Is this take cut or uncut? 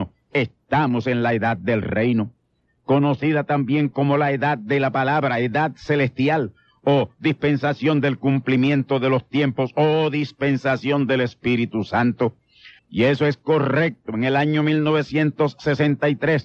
cut